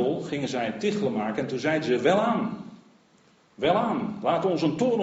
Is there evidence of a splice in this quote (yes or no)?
no